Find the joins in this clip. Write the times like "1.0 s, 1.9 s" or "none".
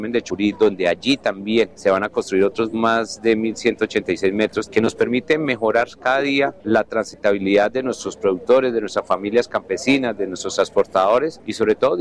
4.7 s